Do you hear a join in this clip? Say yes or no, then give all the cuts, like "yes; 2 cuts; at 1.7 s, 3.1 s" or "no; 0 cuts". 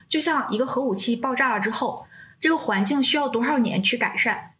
no; 0 cuts